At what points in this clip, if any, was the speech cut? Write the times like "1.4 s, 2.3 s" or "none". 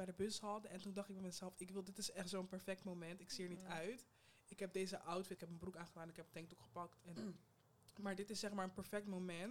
5.4 s, 7.2 s